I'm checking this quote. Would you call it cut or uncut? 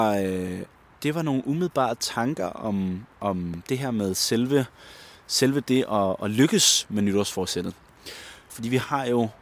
cut